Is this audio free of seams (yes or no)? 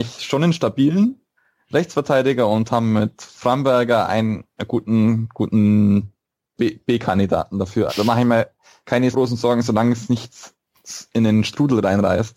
no